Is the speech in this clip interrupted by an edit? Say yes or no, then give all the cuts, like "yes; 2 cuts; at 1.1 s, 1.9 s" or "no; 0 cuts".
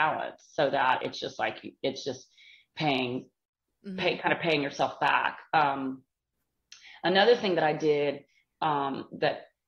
no; 0 cuts